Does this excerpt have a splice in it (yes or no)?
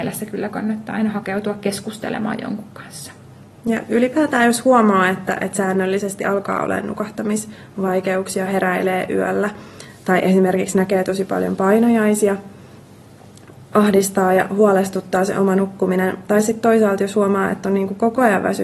yes